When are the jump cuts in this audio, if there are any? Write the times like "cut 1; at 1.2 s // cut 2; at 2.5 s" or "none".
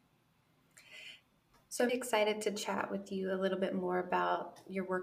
cut 1; at 1.9 s